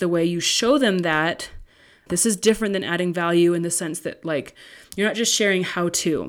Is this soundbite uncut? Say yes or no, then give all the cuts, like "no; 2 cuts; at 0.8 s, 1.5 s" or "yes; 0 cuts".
no; 1 cut; at 2.1 s